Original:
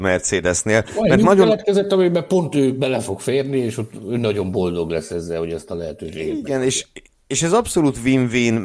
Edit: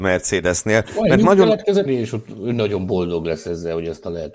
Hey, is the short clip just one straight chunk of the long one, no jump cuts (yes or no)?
no